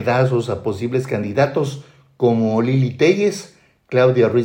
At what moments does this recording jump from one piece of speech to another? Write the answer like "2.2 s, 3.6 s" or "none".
none